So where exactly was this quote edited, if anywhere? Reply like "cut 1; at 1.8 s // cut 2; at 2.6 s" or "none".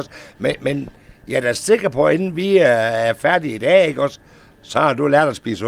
none